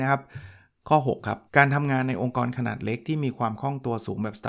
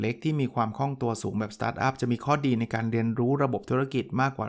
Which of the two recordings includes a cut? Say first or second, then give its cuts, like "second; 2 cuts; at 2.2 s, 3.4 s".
first; 1 cut; at 1.5 s